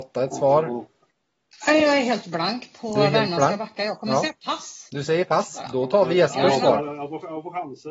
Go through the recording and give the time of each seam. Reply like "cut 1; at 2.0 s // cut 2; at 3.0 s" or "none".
none

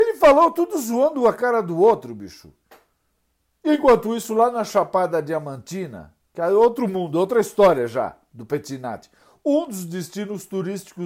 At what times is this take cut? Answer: none

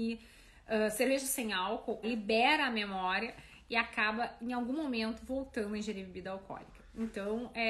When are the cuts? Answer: cut 1; at 2.0 s

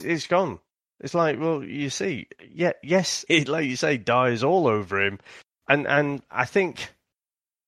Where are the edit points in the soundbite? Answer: cut 1; at 3.3 s // cut 2; at 5.5 s

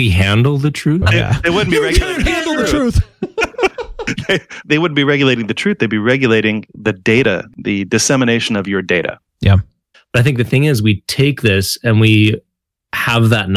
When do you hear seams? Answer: cut 1; at 1.0 s // cut 2; at 9.9 s

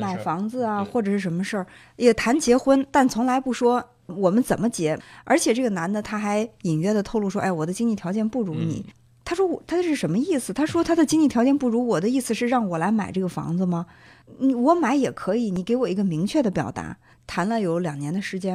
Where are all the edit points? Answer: cut 1; at 17.1 s

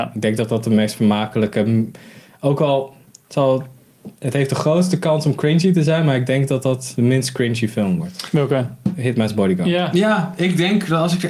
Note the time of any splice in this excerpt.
none

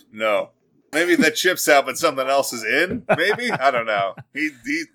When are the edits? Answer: cut 1; at 0.9 s

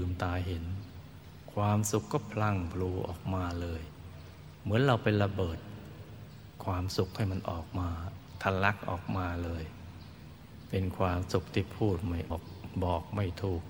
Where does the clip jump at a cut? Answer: cut 1; at 12.3 s

